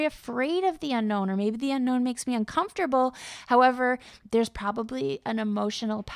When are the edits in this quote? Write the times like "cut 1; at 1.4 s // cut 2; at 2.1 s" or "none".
none

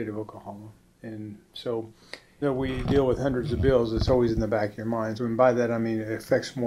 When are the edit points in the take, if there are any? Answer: cut 1; at 2.4 s // cut 2; at 5.2 s

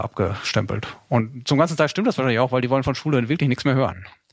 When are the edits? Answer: none

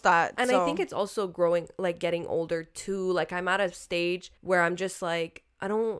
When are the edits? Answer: cut 1; at 4.4 s

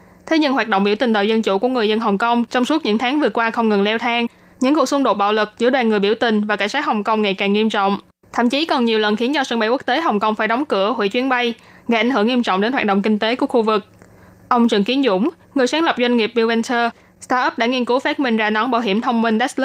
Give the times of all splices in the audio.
none

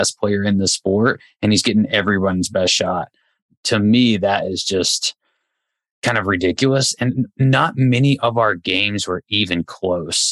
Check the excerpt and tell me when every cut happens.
none

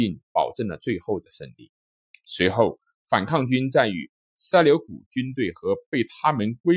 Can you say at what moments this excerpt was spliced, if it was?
none

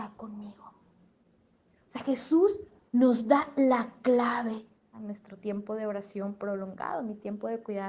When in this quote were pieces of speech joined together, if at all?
cut 1; at 4.9 s

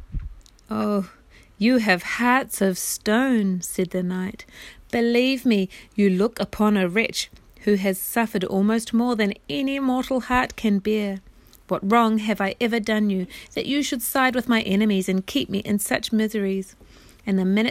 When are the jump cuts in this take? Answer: none

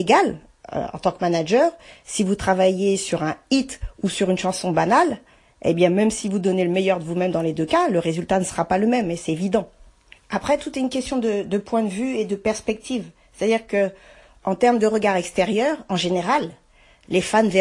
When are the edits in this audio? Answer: none

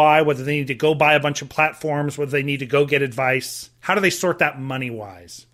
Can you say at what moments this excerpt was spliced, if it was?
none

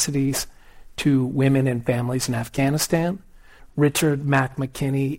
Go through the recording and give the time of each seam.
cut 1; at 3.6 s

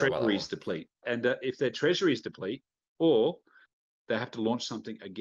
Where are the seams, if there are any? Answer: cut 1; at 1.0 s // cut 2; at 3.0 s

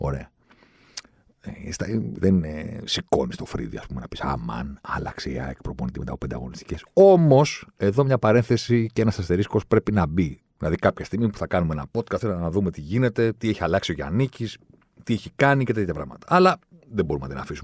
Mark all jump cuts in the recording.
cut 1; at 2.2 s // cut 2; at 10.4 s // cut 3; at 12.2 s

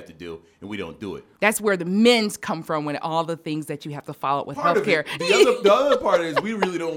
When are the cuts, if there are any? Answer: cut 1; at 1.4 s

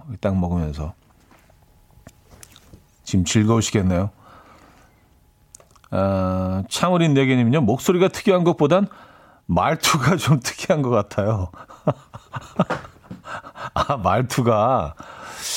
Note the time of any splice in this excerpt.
none

